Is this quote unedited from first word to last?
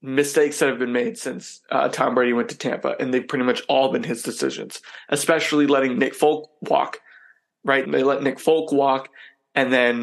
no; 1 cut; at 7.9 s

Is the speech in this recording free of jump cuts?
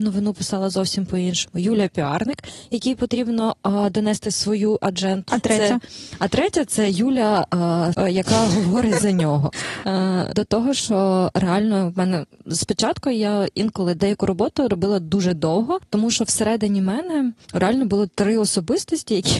no; 3 cuts; at 5.3 s, 7.9 s, 10.3 s

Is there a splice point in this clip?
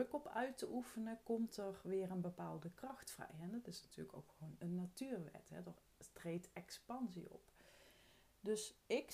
no; 0 cuts

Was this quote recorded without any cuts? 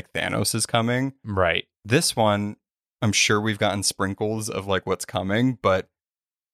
yes; 0 cuts

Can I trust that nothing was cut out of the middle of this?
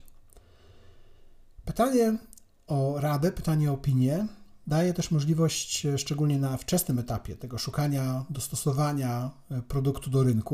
yes; 0 cuts

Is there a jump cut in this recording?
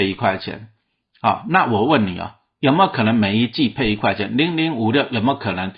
no; 0 cuts

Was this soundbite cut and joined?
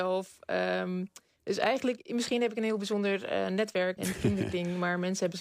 yes; 1 cut; at 4.0 s

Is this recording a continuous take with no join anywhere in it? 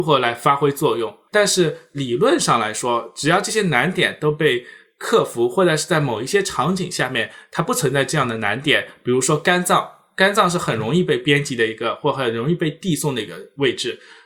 no; 1 cut; at 1.3 s

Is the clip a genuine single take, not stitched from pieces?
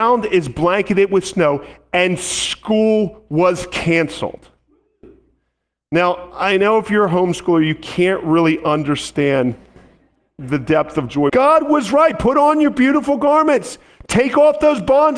no; 1 cut; at 11.3 s

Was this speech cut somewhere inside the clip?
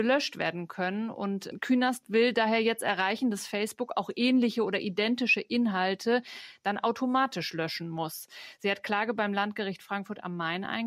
no; 0 cuts

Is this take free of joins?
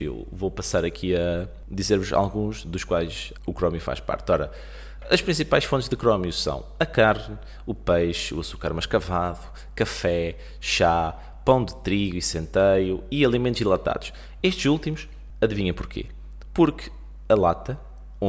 yes; 0 cuts

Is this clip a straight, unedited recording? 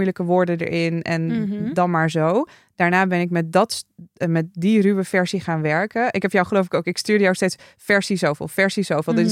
yes; 0 cuts

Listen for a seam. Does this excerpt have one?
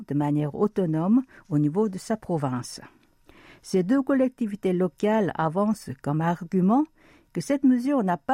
no; 0 cuts

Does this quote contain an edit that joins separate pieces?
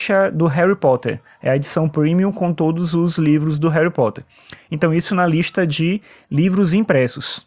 no; 0 cuts

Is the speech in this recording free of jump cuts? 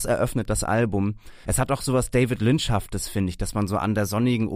no; 1 cut; at 1.4 s

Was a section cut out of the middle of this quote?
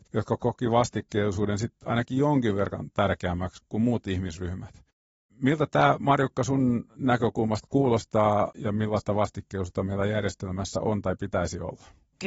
no; 0 cuts

